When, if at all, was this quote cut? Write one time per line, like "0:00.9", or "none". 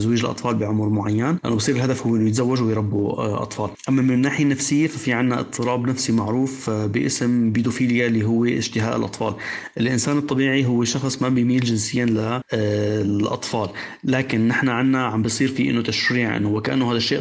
none